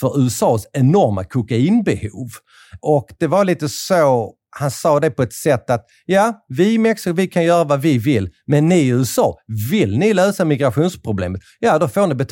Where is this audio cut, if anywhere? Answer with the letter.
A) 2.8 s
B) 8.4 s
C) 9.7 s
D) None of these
A